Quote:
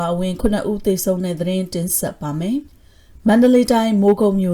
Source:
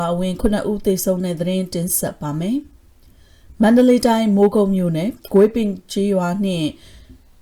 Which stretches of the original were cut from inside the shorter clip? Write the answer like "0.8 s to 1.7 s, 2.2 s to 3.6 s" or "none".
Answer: 2.7 s to 3.0 s